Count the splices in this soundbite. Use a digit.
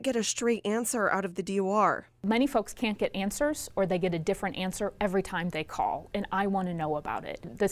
0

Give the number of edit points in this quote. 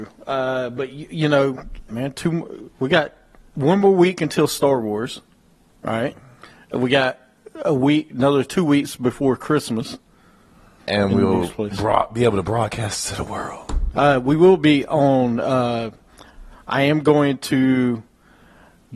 3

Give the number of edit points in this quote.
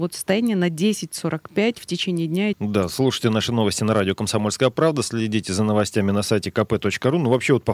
1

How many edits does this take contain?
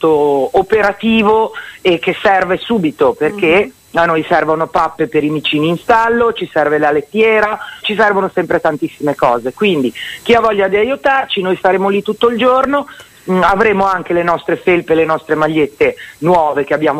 1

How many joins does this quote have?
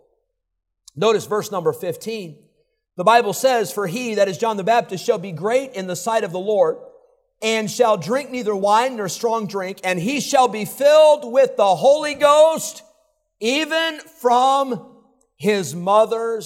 0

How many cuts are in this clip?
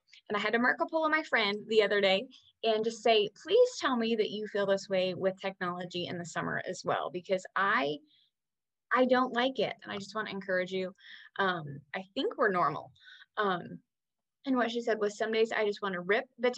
2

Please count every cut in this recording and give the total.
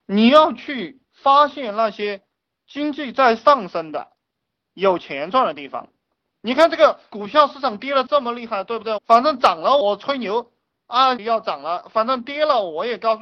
2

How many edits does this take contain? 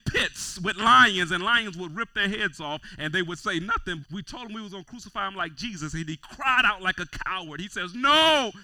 1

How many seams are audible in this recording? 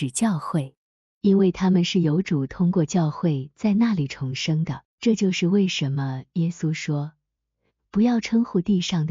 2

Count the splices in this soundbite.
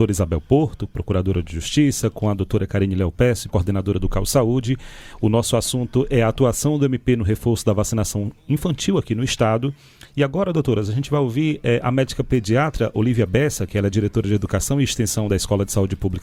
1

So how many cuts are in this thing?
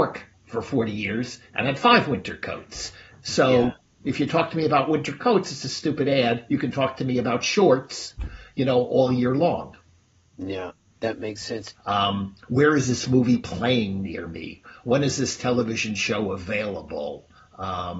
1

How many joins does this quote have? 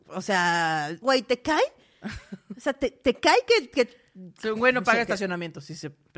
1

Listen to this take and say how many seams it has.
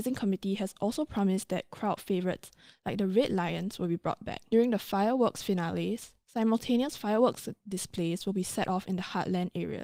0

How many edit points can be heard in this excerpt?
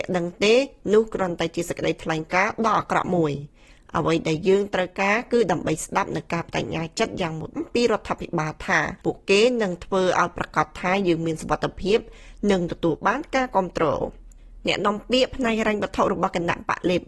2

